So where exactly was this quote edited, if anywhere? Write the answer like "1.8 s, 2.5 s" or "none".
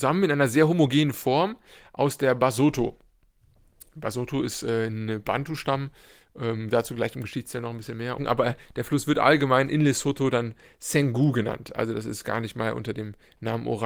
8.2 s